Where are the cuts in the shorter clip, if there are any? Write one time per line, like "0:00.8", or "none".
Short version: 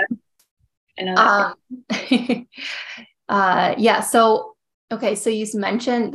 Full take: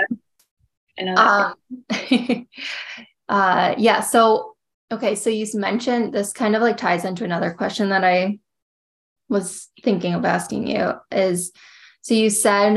none